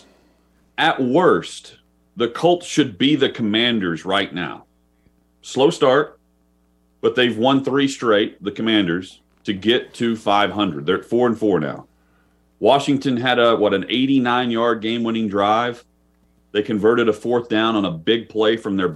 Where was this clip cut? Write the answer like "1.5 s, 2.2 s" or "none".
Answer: none